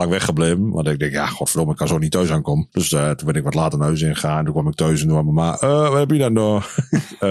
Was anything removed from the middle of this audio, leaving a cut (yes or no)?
yes